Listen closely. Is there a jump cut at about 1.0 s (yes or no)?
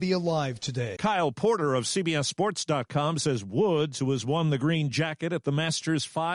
yes